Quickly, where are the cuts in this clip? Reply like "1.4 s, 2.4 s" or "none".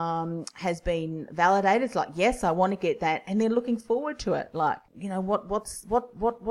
4.9 s